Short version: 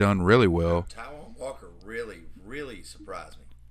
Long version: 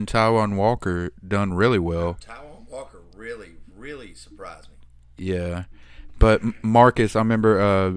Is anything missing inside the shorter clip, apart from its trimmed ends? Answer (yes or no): no